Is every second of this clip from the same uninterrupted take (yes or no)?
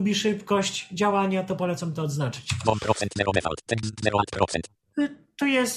yes